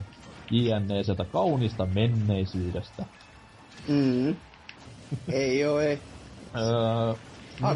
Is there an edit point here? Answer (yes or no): yes